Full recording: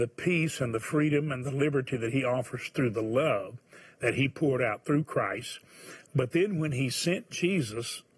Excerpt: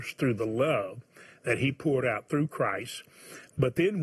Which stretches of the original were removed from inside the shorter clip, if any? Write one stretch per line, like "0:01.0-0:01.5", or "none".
none